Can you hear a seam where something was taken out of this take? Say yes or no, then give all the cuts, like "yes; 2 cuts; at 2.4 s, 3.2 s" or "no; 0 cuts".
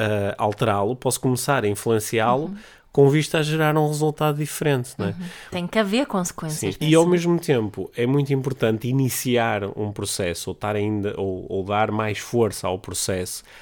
yes; 2 cuts; at 5.5 s, 6.8 s